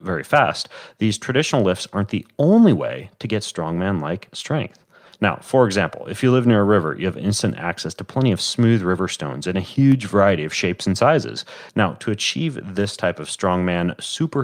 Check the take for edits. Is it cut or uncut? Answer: cut